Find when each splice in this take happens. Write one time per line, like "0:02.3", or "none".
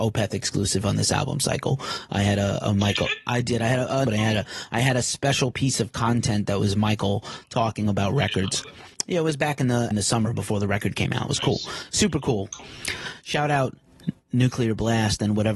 0:04.1
0:09.9